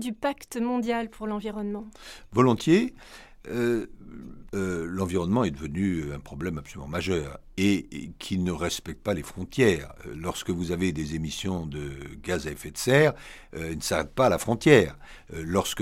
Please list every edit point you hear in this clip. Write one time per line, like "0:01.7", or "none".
0:04.5